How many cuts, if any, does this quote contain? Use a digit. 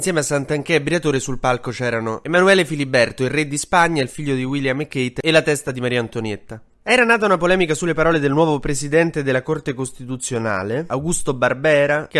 0